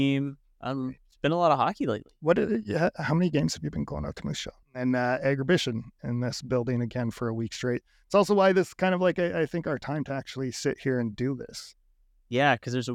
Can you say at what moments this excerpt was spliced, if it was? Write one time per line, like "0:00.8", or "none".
0:04.6